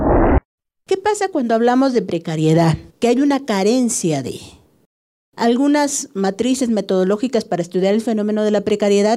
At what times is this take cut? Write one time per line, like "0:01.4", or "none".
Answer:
0:02.9